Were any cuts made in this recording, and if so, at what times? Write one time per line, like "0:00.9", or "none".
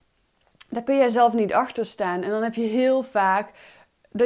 none